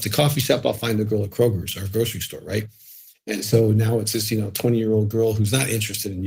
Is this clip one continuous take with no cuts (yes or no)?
yes